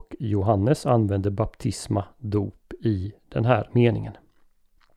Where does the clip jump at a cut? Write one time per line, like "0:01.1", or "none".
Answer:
none